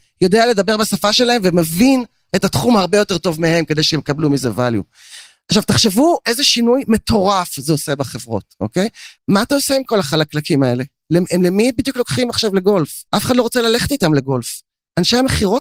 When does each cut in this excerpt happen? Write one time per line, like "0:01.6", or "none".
0:09.2
0:13.1